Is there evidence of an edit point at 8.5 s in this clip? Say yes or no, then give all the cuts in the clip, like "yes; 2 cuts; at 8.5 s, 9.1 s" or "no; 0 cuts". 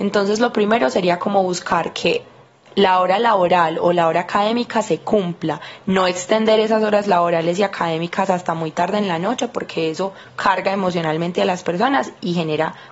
no; 0 cuts